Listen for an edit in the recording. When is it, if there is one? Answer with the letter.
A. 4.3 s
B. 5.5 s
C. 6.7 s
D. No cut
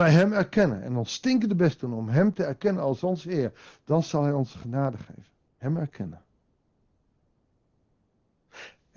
B